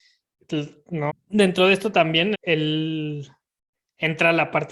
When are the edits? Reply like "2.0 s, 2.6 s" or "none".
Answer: 1.1 s, 2.3 s